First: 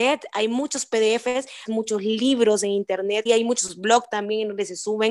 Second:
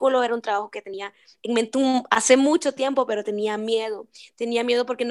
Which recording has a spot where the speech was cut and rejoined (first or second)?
first